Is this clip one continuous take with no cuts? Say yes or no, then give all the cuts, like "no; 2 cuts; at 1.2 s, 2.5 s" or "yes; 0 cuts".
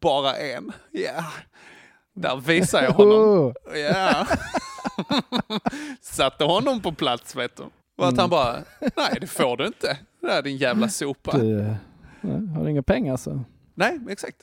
no; 1 cut; at 7.8 s